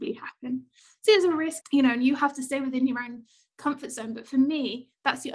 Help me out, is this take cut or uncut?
cut